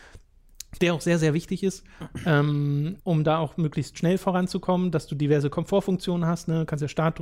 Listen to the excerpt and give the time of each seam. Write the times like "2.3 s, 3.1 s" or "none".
3.0 s